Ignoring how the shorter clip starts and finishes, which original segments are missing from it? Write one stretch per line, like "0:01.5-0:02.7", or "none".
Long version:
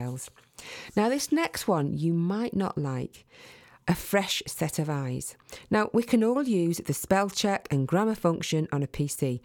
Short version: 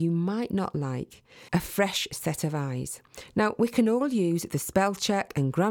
0:03.5-0:03.8